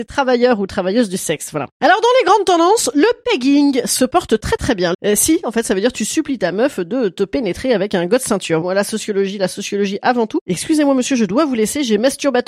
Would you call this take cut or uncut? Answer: cut